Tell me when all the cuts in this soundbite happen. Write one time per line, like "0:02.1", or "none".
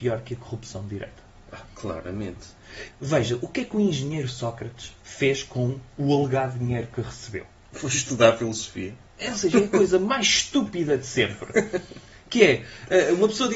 0:02.9